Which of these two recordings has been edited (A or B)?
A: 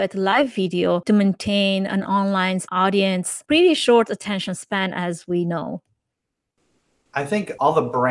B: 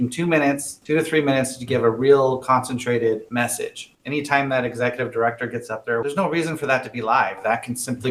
B